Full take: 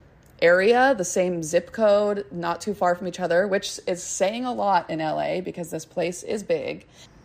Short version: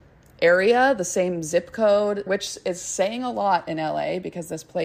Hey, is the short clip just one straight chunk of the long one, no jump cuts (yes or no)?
no